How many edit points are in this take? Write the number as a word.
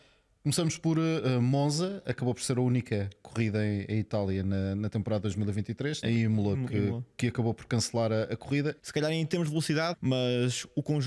three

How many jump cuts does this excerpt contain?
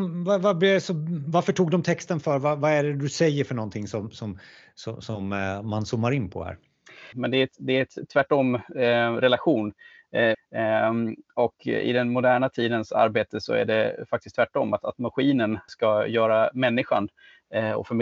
three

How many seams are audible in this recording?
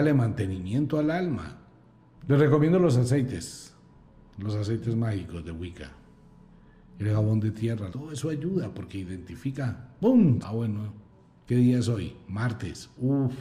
three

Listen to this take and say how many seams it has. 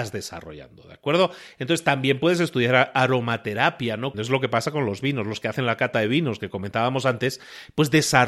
one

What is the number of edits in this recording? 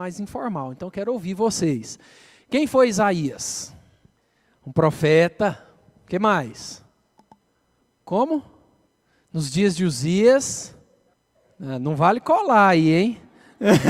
zero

